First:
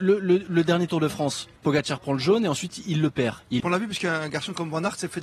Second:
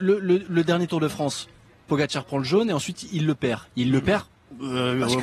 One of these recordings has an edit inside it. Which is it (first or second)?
first